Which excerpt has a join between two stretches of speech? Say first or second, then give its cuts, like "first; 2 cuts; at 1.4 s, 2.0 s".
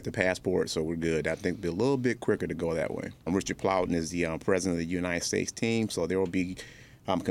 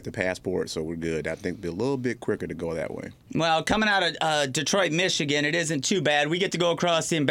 first; 1 cut; at 3.3 s